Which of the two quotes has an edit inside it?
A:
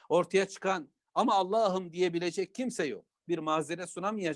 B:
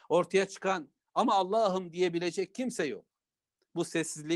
A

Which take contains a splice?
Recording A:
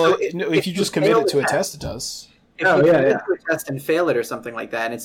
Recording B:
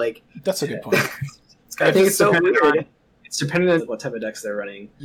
B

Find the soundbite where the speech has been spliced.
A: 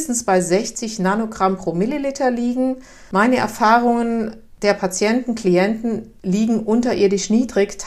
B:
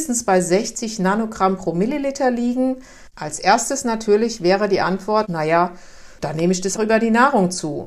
B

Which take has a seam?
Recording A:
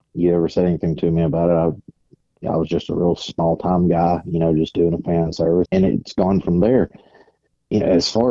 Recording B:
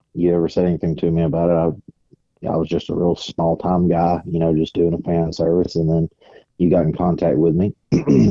A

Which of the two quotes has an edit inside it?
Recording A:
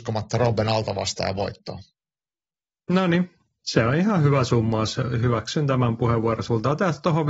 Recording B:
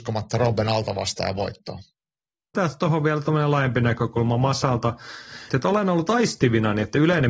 B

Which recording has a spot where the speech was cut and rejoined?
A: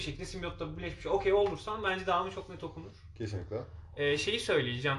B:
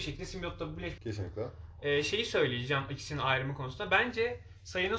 B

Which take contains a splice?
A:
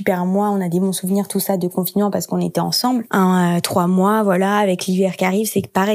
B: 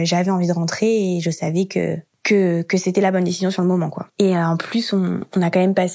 A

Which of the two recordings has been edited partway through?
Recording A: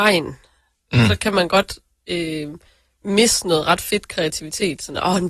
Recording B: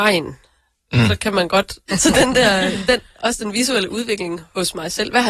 B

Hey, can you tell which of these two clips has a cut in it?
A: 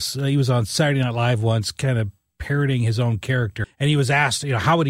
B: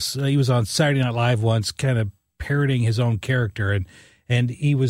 A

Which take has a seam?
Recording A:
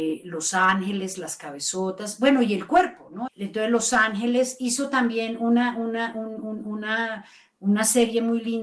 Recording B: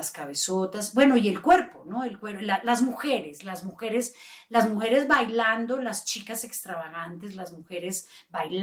A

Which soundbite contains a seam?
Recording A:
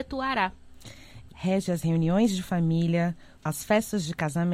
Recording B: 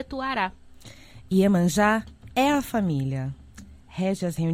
A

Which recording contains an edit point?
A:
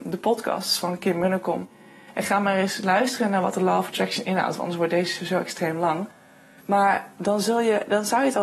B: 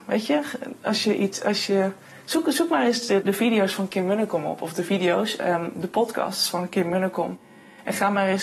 B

